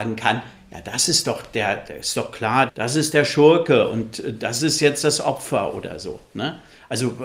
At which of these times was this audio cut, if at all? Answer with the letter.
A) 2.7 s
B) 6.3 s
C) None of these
A